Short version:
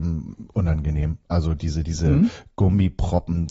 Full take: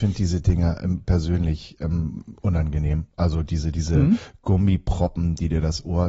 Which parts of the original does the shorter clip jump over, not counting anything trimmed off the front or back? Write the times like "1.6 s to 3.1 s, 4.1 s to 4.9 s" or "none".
none